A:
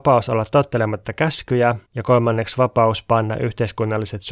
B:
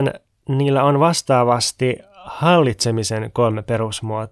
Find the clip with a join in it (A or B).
A